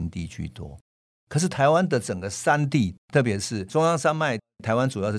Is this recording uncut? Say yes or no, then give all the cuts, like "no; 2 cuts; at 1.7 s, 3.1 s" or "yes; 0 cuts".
no; 1 cut; at 3.0 s